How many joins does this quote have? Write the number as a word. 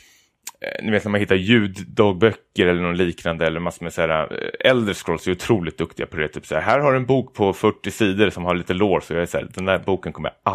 zero